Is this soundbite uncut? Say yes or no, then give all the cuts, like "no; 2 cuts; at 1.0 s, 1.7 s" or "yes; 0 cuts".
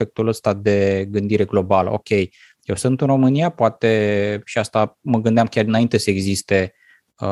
yes; 0 cuts